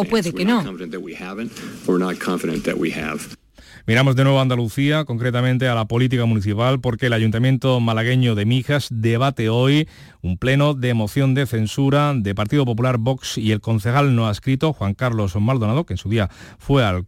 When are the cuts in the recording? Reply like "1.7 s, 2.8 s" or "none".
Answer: none